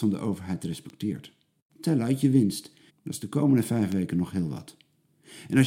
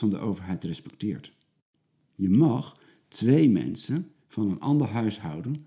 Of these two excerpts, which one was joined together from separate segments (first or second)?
first